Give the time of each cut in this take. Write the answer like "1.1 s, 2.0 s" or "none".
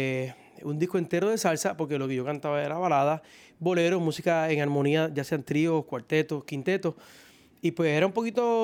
none